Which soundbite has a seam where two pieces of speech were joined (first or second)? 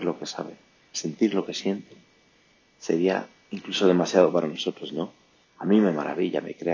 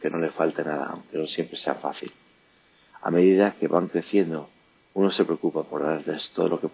first